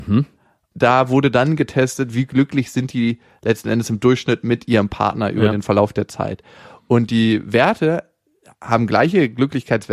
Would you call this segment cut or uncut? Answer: uncut